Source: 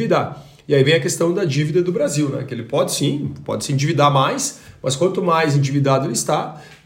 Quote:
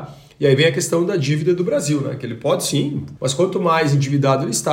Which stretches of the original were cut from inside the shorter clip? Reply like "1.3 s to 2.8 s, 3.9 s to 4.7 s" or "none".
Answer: 3.5 s to 4.8 s